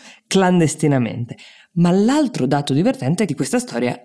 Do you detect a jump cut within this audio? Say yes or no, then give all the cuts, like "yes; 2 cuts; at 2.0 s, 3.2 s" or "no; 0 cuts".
no; 0 cuts